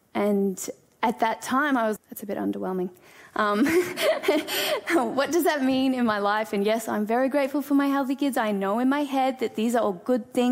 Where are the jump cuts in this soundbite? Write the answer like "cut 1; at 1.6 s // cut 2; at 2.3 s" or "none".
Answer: cut 1; at 2.0 s